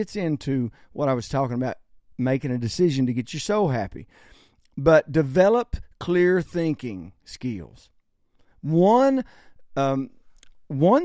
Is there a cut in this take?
no; 0 cuts

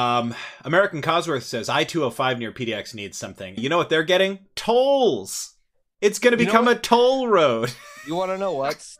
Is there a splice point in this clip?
yes; 1 cut; at 3.6 s

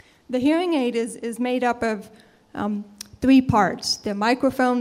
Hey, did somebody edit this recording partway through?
no; 0 cuts

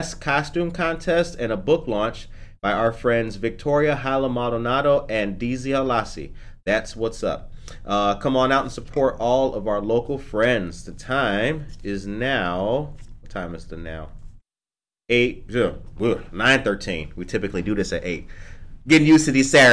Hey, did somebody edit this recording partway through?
no; 0 cuts

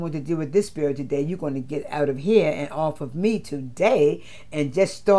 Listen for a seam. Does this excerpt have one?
no; 0 cuts

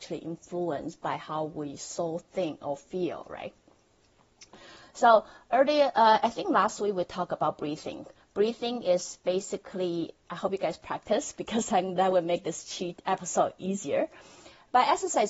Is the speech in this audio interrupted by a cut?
no; 0 cuts

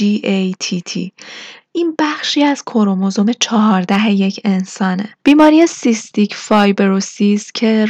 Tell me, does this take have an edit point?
yes; 1 cut; at 5.2 s

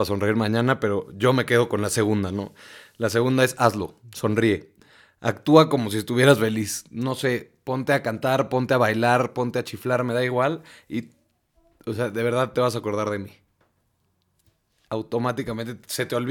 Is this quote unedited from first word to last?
yes; 0 cuts

